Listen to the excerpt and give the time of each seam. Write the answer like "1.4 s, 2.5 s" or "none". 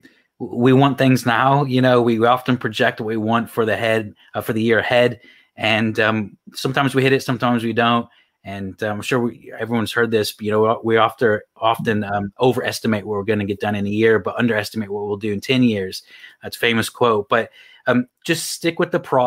12.4 s, 18.1 s